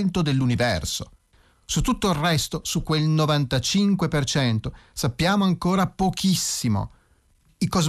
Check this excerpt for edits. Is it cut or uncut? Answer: uncut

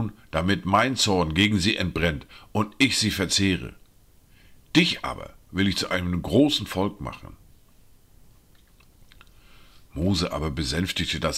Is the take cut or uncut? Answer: uncut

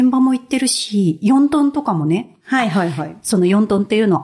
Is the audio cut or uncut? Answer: uncut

